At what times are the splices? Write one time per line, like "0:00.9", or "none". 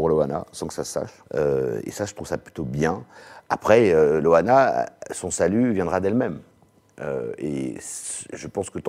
0:01.2